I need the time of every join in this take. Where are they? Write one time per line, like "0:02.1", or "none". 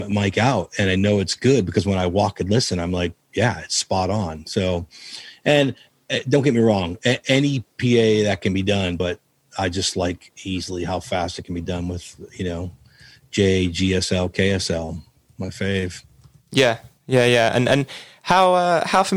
none